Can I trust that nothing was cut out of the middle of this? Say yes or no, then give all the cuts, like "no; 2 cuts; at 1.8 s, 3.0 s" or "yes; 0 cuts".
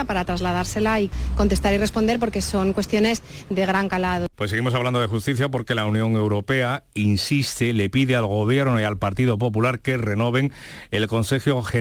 no; 1 cut; at 4.3 s